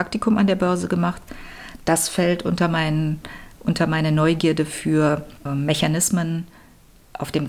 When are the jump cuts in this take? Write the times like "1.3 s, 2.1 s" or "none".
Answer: 5.4 s